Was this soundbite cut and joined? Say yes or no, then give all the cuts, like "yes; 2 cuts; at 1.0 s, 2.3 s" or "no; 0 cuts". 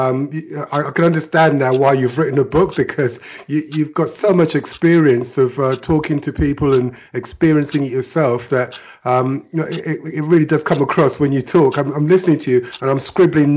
no; 0 cuts